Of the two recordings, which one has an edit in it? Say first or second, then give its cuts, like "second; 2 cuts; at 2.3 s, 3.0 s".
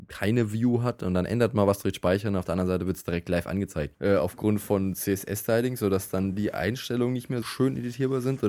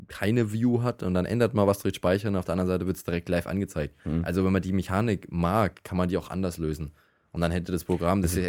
first; 2 cuts; at 3.9 s, 7.4 s